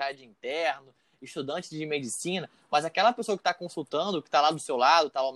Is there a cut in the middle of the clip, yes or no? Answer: no